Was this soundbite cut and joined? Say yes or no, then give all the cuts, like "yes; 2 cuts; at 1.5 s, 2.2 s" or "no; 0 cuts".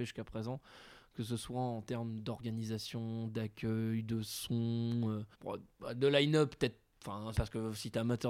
yes; 2 cuts; at 5.3 s, 7.4 s